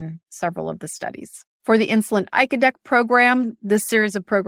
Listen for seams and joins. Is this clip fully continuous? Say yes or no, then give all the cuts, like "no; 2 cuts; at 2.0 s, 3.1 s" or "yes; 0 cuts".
no; 1 cut; at 1.5 s